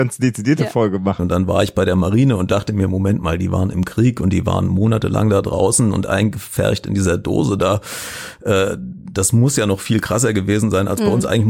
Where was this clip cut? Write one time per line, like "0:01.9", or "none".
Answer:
0:01.2